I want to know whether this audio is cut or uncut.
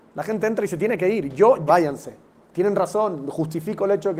cut